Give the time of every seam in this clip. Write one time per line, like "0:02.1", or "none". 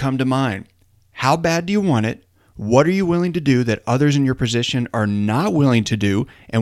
none